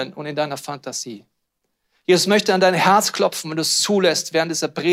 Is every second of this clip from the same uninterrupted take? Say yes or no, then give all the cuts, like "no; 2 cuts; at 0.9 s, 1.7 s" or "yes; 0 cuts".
yes; 0 cuts